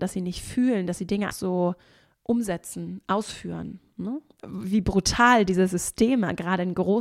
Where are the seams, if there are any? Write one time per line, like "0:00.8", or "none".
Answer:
0:01.3
0:04.4

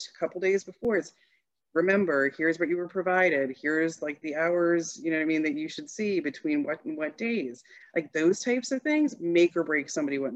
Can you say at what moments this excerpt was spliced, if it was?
none

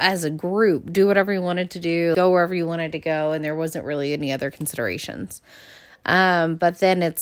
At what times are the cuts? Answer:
0:02.1

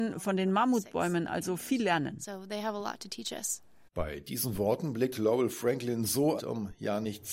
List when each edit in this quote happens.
0:06.4

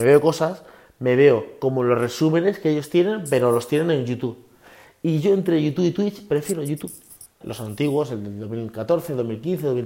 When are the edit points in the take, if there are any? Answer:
0:07.4

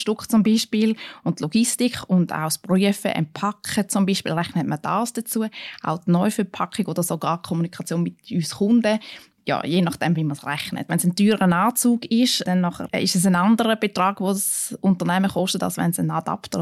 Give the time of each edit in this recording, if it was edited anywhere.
0:10.9

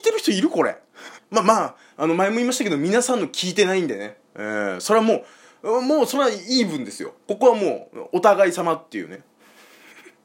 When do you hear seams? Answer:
0:01.2

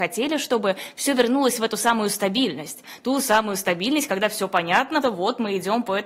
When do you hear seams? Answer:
0:05.0

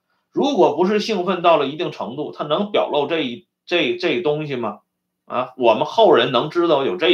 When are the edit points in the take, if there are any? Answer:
none

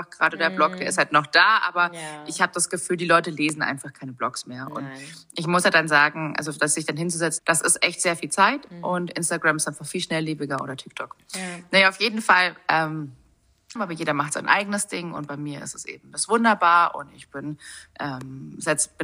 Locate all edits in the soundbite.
0:07.4
0:13.8

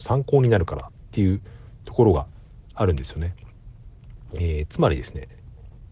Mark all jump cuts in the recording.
none

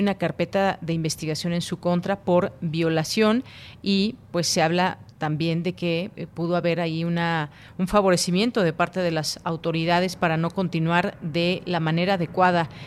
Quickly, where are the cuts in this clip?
0:06.1

